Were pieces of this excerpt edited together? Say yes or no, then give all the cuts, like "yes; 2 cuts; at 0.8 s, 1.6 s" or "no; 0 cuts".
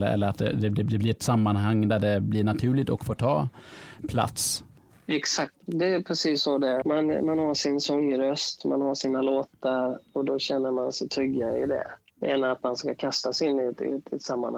yes; 2 cuts; at 6.8 s, 12.0 s